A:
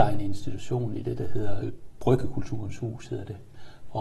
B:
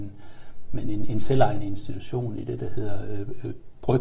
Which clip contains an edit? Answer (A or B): A